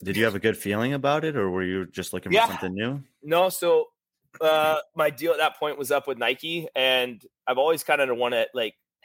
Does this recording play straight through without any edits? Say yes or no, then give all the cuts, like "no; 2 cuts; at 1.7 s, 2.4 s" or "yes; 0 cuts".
yes; 0 cuts